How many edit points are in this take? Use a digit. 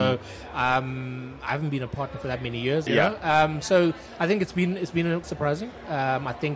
2